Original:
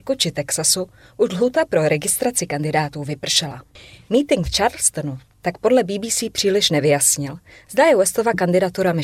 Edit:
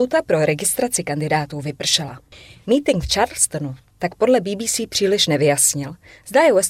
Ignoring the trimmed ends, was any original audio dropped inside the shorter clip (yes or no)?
no